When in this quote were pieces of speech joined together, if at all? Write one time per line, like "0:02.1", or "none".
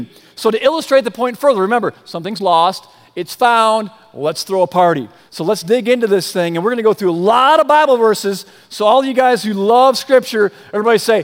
0:05.3